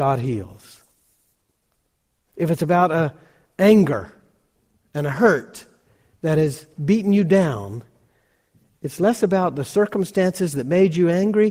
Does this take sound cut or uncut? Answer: uncut